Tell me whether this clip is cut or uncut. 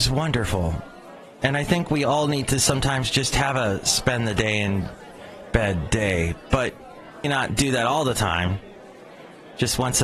cut